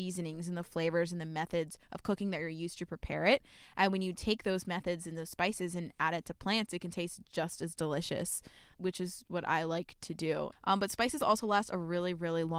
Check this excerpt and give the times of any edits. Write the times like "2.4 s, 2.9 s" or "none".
8.7 s, 10.5 s